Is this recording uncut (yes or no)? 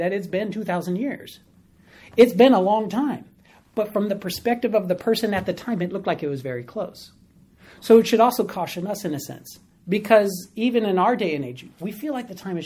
yes